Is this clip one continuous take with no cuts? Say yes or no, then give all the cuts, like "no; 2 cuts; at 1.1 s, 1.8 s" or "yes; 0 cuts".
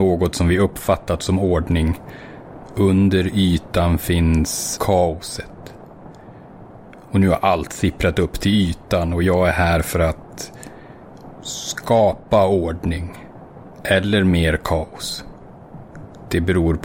no; 1 cut; at 4.8 s